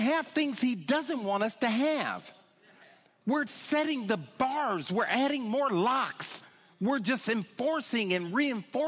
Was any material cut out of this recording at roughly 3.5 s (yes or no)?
yes